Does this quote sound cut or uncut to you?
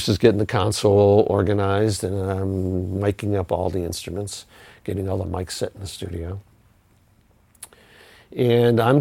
uncut